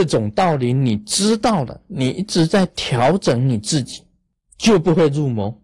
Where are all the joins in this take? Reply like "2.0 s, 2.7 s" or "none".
4.5 s